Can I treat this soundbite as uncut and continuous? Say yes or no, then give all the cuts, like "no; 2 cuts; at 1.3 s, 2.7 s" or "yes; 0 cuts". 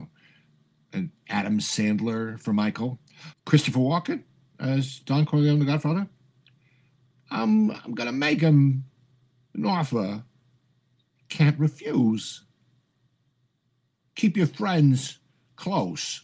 no; 1 cut; at 3.3 s